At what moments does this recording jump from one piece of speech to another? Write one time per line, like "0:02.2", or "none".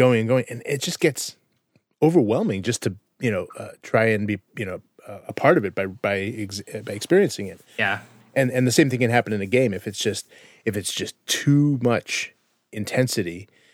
none